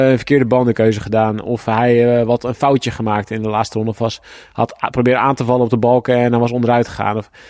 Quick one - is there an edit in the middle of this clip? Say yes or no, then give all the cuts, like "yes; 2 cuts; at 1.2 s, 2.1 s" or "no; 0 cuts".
no; 0 cuts